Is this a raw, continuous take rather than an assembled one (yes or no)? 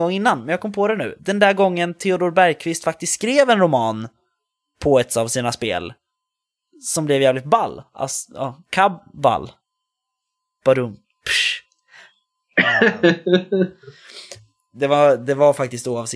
yes